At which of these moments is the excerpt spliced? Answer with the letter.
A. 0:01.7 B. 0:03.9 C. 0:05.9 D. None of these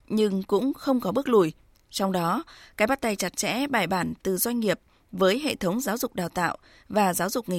A